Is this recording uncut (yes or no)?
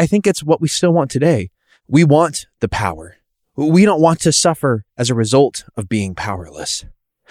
yes